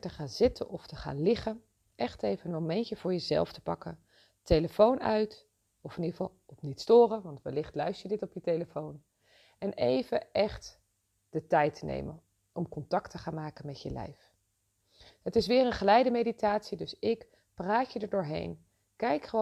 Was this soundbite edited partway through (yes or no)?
no